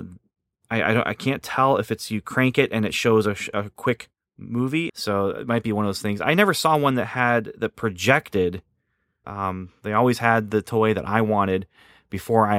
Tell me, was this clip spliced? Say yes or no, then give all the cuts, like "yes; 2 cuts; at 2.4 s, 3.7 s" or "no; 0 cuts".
yes; 2 cuts; at 4.9 s, 9.2 s